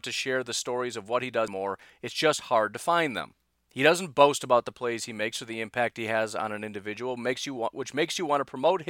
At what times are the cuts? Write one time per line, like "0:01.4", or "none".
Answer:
0:01.5